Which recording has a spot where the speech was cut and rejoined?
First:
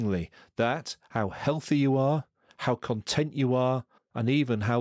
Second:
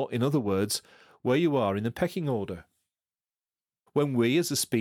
second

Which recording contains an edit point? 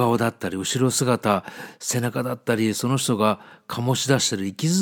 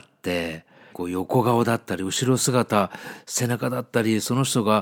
second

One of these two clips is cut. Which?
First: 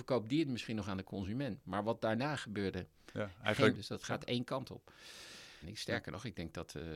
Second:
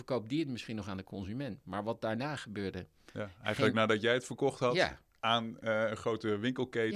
first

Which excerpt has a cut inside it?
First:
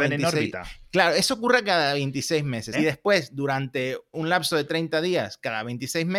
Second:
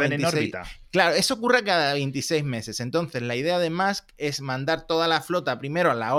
first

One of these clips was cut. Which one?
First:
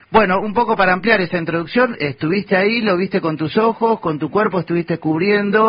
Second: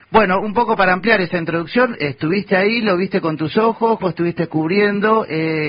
second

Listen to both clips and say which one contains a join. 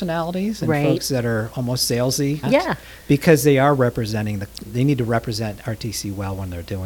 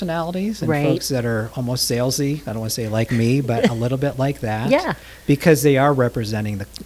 first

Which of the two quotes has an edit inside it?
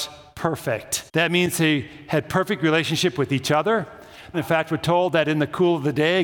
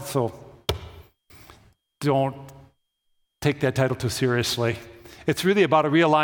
first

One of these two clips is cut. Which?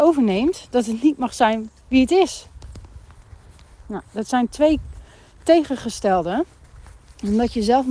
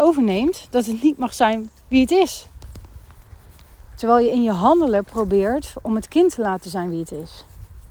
first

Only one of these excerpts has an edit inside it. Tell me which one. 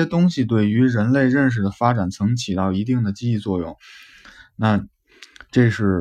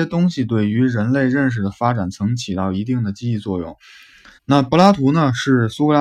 second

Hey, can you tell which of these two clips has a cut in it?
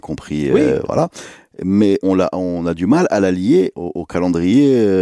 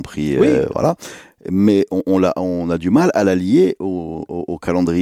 first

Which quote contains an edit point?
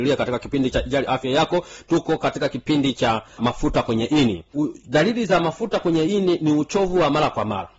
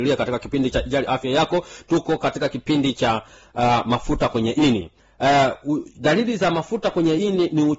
first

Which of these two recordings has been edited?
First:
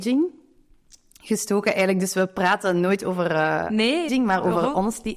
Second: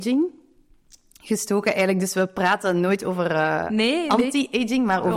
first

